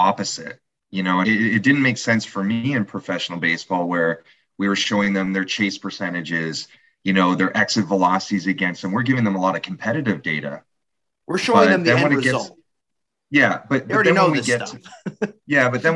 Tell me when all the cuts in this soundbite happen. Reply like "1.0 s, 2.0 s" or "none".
1.2 s